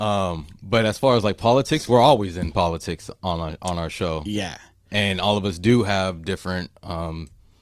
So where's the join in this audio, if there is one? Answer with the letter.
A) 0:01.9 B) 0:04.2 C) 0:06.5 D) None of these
D